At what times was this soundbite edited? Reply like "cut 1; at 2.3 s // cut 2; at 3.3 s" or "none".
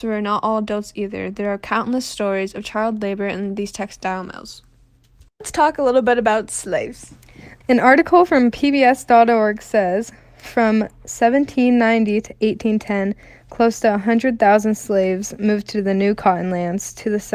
cut 1; at 7.6 s

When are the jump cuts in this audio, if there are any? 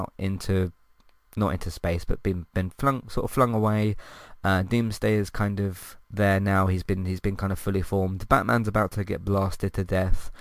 cut 1; at 6.0 s

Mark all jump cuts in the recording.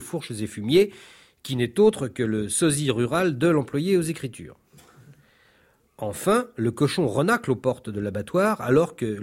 none

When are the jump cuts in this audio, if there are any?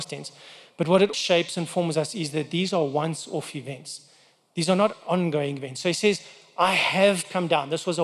cut 1; at 1.1 s

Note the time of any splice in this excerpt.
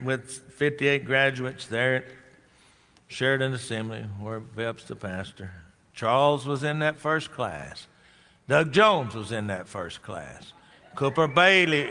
none

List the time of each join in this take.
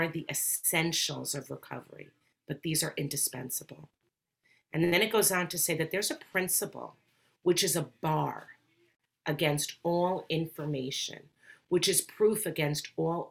none

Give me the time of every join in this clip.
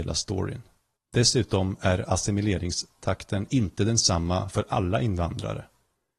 cut 1; at 1.0 s

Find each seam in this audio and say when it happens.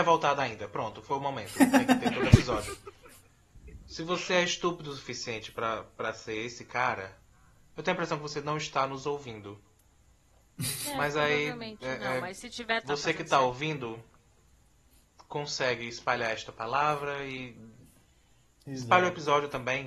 cut 1; at 12.8 s

